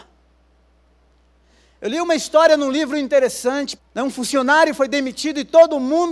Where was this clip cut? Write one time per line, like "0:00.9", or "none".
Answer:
0:03.8